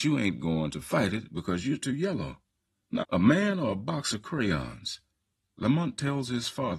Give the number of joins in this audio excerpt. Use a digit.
2